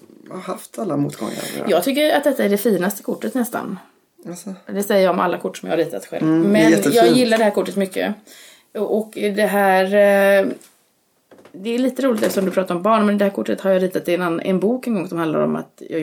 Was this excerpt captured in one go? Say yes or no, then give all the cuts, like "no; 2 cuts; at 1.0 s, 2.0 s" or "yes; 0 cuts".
yes; 0 cuts